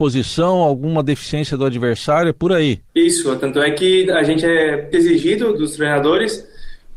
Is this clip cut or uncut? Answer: cut